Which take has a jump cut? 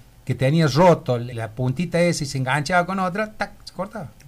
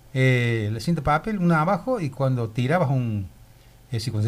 first; 1 cut; at 1.3 s

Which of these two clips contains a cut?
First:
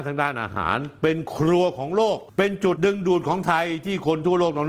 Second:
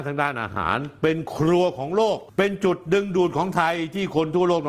first; 1 cut; at 2.8 s

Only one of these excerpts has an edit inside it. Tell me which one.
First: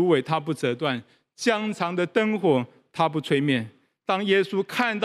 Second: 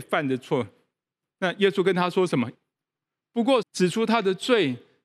second; 2 cuts; at 2.5 s, 3.6 s

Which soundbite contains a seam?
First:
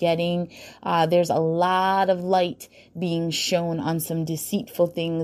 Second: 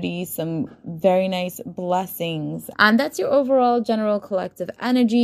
second; 1 cut; at 2.7 s

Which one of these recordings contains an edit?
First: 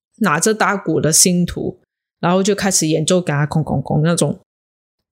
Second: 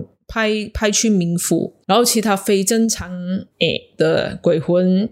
second; 1 cut; at 3.5 s

